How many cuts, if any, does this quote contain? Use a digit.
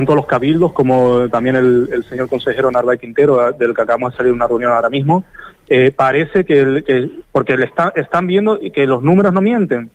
1